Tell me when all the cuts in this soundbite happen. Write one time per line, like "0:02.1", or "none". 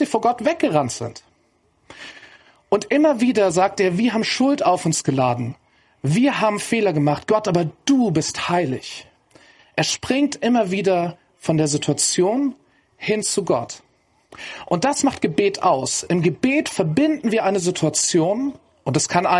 none